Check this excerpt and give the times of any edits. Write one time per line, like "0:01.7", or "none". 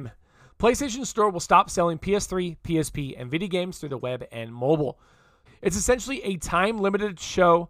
0:05.5